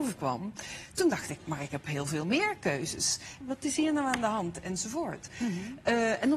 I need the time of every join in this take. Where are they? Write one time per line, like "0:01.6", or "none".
0:01.4
0:03.4